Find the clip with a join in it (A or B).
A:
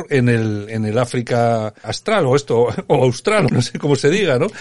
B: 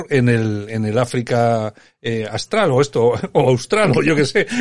A